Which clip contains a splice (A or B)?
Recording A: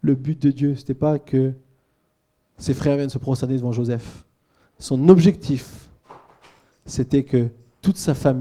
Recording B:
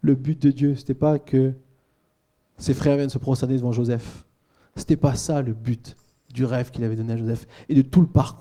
A